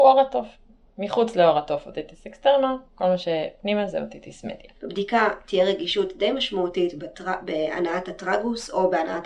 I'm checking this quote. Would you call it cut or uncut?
cut